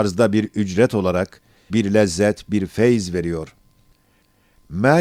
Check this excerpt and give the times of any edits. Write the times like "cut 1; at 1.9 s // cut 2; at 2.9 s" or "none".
cut 1; at 1.7 s